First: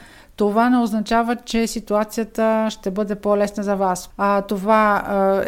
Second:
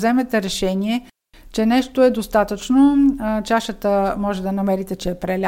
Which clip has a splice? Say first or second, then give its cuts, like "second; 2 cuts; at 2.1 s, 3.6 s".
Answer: first; 1 cut; at 4.1 s